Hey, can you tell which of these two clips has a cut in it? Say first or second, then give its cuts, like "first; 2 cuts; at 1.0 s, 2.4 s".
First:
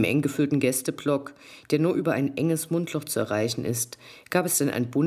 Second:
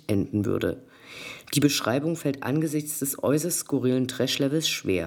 second; 1 cut; at 1.4 s